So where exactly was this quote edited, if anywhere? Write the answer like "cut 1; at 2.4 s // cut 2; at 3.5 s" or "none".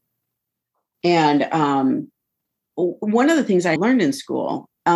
cut 1; at 0.9 s // cut 2; at 2.7 s // cut 3; at 3.8 s